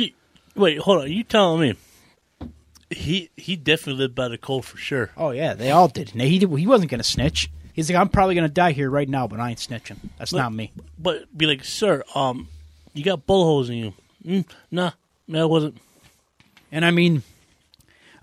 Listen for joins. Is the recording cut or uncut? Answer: cut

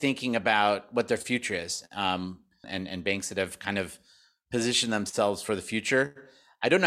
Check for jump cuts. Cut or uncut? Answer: cut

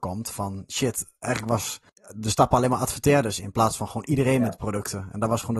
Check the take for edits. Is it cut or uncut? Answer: cut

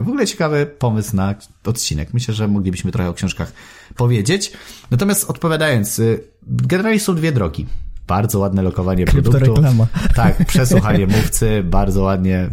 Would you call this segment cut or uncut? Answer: uncut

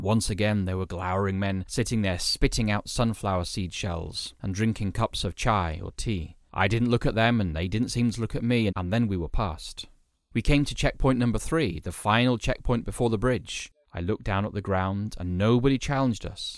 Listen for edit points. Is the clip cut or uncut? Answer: cut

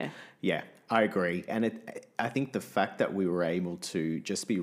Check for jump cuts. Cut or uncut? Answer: cut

